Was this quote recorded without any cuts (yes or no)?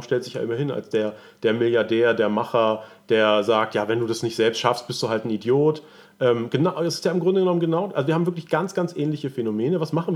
yes